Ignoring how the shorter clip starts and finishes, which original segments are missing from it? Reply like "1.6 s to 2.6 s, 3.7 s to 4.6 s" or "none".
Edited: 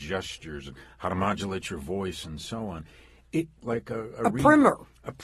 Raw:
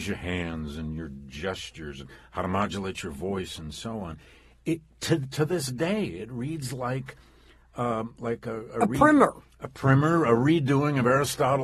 4.9 s to 8.2 s